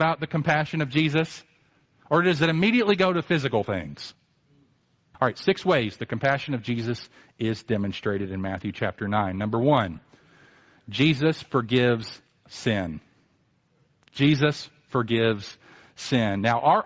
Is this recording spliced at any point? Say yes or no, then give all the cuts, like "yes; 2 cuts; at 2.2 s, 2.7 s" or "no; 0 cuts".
yes; 1 cut; at 5.1 s